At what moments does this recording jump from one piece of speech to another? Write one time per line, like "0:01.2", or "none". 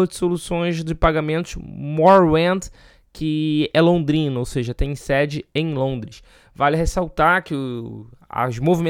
none

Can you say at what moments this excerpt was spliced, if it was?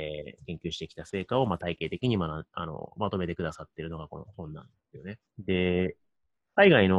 0:05.2

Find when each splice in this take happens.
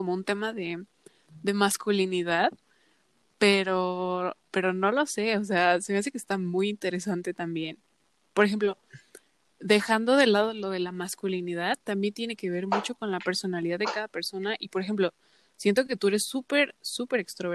none

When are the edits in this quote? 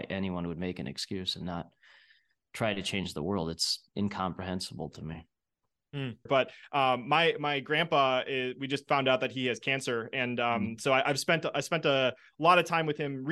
0:06.3

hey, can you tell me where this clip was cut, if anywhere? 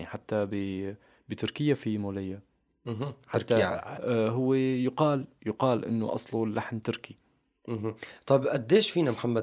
0:04.0

